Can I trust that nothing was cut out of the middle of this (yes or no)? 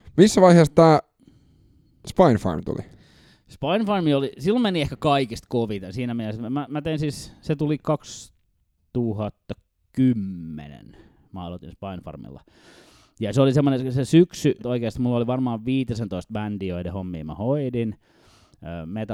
no